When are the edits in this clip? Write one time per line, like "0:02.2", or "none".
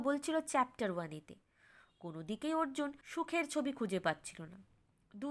0:03.0